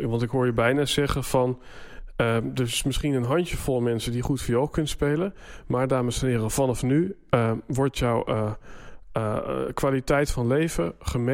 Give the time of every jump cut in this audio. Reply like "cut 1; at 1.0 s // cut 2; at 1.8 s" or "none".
none